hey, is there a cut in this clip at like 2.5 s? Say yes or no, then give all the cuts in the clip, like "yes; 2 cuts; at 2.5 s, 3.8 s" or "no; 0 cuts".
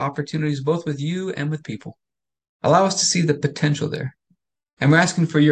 yes; 1 cut; at 2.5 s